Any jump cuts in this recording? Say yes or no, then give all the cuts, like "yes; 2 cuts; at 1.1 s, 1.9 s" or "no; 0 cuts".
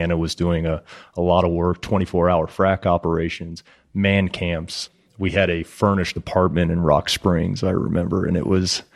no; 0 cuts